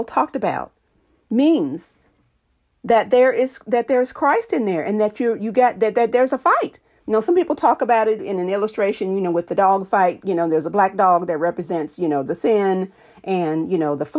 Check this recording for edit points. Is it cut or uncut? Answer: uncut